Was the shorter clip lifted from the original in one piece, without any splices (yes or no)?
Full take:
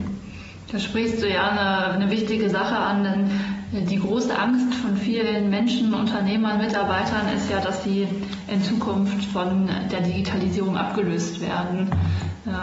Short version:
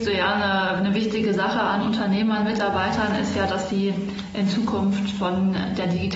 no